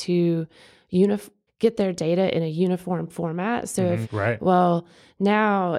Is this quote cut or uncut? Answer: cut